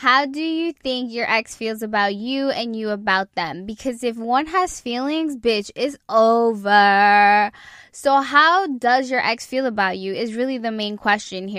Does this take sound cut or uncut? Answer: uncut